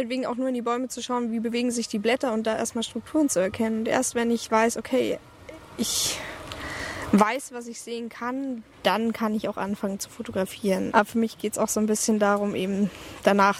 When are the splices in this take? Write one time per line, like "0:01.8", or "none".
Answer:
0:08.7
0:10.9